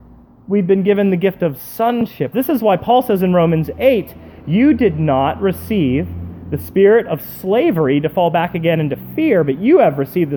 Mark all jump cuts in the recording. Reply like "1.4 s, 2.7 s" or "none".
2.3 s